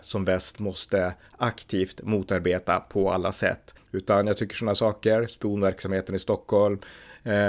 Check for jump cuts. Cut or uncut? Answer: cut